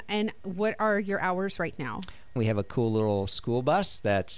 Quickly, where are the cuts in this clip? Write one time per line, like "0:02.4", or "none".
0:02.4